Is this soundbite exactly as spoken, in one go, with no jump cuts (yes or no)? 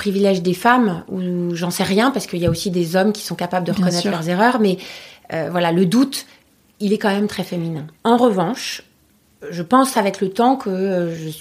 no